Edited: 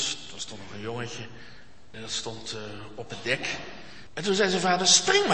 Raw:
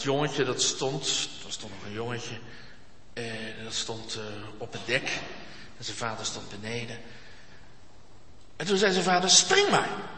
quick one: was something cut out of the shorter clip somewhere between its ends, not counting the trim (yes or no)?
yes